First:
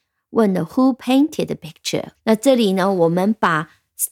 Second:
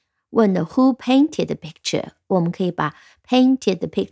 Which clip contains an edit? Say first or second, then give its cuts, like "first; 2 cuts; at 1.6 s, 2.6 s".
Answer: first; 1 cut; at 2.1 s